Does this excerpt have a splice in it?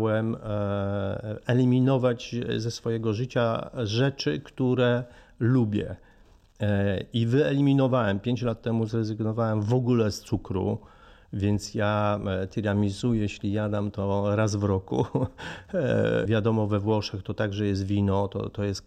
yes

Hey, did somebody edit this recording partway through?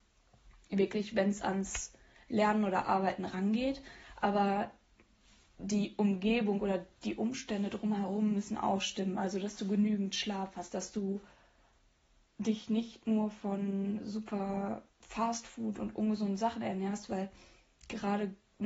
yes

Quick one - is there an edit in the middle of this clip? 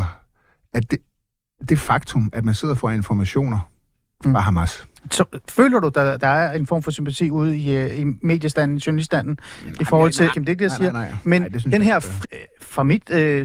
yes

